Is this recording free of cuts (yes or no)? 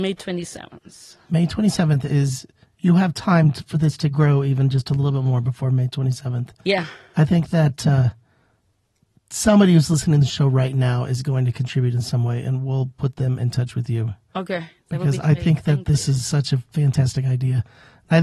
yes